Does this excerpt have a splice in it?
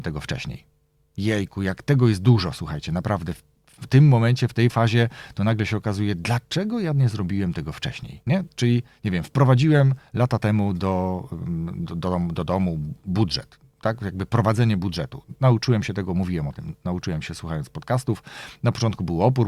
yes; 1 cut; at 8.2 s

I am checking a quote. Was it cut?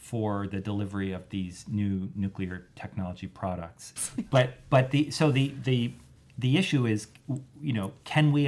yes; 1 cut; at 4.0 s

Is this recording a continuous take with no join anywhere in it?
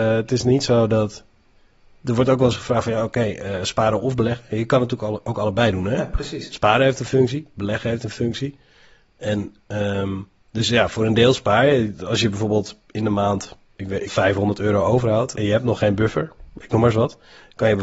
no; 2 cuts; at 14.1 s, 15.3 s

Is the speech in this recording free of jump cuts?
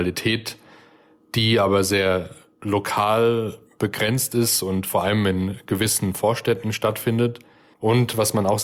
no; 1 cut; at 7.7 s

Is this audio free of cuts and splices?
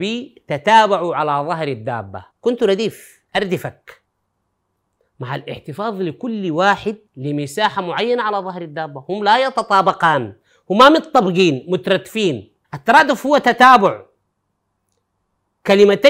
no; 3 cuts; at 2.3 s, 7.1 s, 12.6 s

